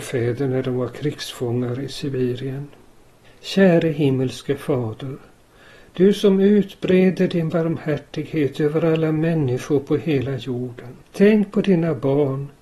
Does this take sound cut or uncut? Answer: cut